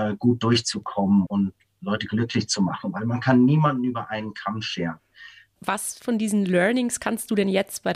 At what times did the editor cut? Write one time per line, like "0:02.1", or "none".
0:01.3
0:05.6